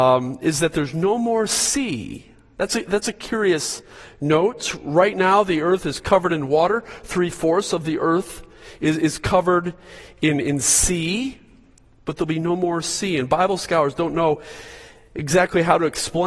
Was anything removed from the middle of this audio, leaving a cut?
no; 0 cuts

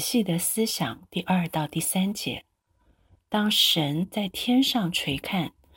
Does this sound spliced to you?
no; 0 cuts

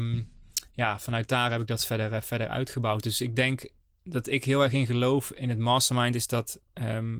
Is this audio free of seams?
yes; 0 cuts

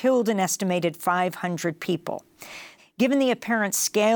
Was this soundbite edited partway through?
yes; 1 cut; at 2.8 s

